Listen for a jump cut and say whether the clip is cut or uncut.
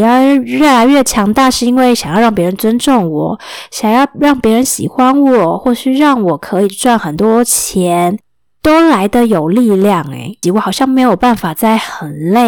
cut